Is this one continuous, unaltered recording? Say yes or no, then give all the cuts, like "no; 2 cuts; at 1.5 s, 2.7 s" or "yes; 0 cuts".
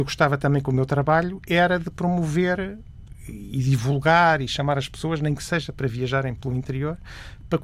yes; 0 cuts